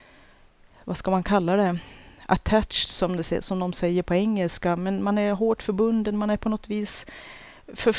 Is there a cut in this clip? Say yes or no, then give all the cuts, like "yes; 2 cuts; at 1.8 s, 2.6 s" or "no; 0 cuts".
no; 0 cuts